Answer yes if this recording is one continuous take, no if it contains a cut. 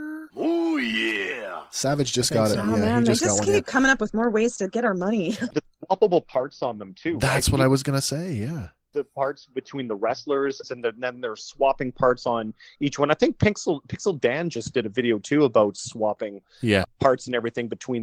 no